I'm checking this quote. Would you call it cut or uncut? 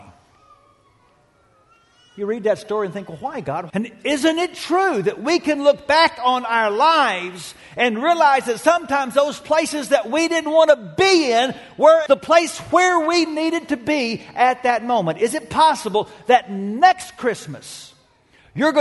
cut